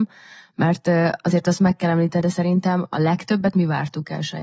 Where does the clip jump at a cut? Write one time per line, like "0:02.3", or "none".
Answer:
0:02.2